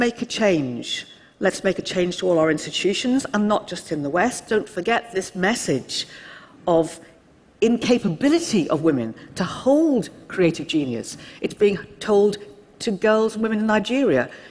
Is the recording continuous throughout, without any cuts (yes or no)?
yes